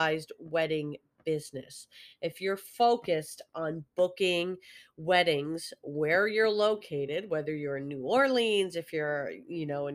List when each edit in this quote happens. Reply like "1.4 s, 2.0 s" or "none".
none